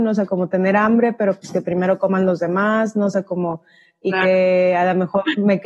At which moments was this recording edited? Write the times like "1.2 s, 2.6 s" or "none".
none